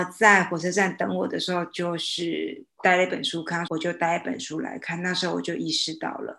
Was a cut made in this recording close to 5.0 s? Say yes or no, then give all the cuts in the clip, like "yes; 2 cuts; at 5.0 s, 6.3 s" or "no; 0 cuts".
no; 1 cut; at 3.7 s